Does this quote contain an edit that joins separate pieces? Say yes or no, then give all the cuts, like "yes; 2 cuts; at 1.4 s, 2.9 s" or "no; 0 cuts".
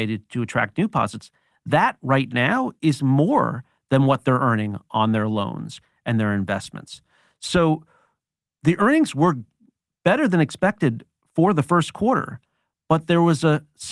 no; 0 cuts